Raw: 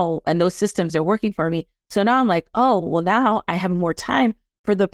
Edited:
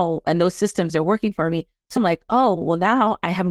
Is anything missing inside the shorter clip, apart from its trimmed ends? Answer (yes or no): yes